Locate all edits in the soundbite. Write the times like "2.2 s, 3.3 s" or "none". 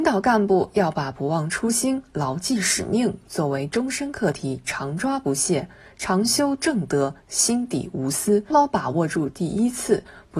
8.5 s